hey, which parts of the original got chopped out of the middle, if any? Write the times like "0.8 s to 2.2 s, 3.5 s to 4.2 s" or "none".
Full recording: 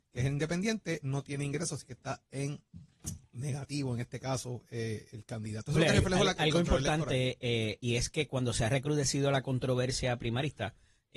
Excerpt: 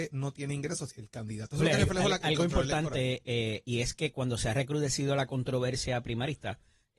1.8 s to 5.1 s